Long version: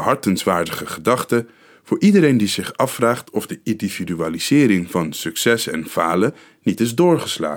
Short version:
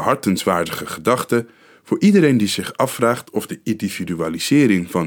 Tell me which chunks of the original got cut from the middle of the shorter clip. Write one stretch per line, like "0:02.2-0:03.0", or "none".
none